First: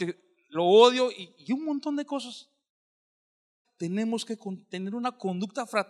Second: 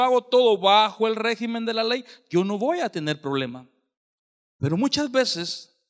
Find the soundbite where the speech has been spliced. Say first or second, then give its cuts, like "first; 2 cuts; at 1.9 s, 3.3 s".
first; 1 cut; at 3.6 s